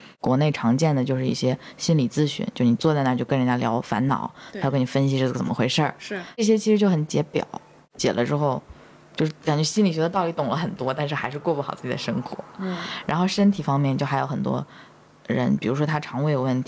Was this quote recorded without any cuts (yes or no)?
yes